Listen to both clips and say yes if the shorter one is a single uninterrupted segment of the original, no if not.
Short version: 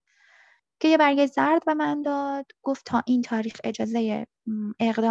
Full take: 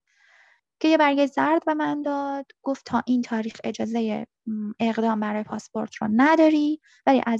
yes